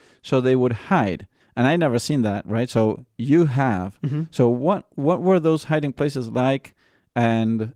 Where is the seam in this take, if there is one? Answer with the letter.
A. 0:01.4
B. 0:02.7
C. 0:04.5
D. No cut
A